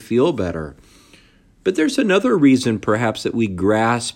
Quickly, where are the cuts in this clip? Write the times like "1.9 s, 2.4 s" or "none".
none